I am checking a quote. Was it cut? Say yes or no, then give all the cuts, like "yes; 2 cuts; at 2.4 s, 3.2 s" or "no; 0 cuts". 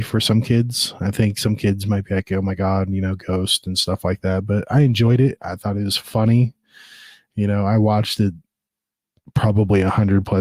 no; 0 cuts